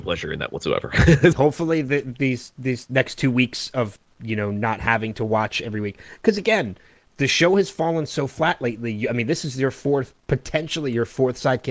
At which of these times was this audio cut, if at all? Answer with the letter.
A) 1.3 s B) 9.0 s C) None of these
A